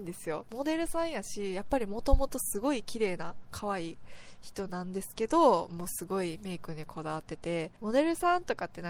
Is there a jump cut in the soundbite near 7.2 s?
no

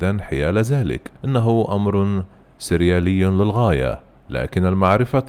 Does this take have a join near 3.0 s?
no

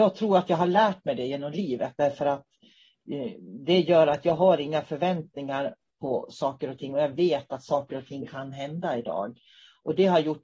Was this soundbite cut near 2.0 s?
yes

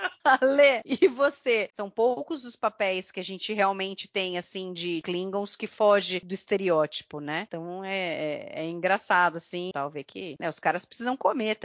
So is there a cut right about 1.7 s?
yes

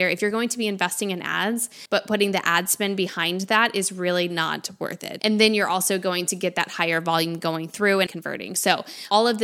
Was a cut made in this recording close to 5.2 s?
yes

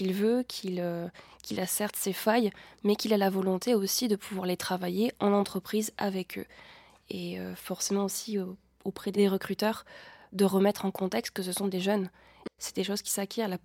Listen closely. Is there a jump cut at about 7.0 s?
no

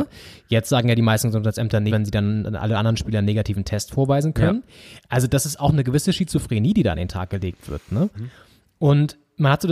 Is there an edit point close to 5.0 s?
no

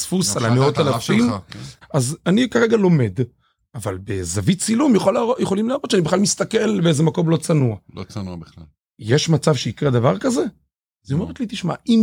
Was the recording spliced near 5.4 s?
no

